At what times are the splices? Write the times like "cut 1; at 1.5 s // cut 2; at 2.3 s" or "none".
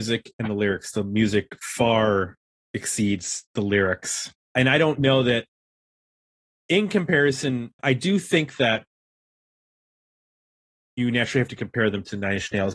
cut 1; at 4.4 s // cut 2; at 7.8 s